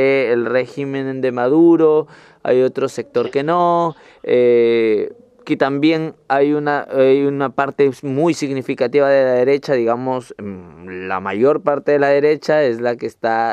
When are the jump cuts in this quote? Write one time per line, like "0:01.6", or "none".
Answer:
none